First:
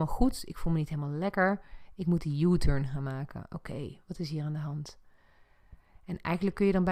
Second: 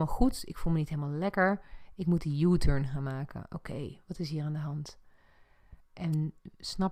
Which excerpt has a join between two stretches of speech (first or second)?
second